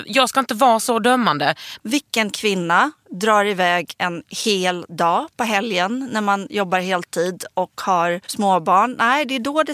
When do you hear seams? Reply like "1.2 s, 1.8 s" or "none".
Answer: 1.8 s, 8.2 s